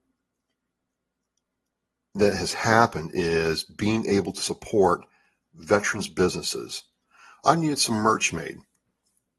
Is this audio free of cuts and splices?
yes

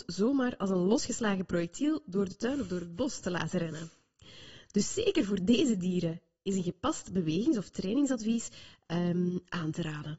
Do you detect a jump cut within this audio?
no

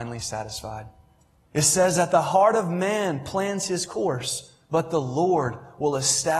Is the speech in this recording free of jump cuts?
no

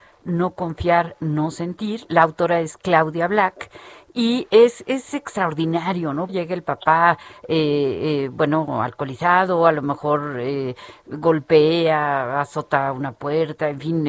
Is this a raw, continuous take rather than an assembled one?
no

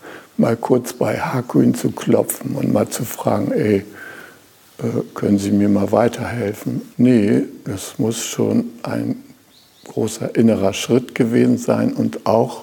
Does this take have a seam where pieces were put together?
yes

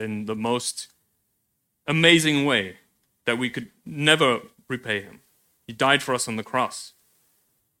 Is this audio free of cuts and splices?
yes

